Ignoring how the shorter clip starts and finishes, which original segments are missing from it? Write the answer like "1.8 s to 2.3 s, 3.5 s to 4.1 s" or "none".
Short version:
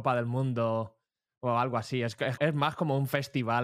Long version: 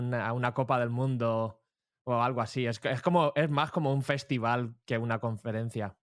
3.0 s to 3.3 s